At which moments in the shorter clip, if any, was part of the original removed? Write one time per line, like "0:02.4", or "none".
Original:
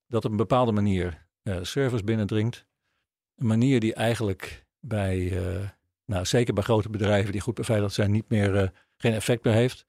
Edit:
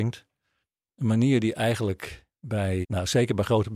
0:02.8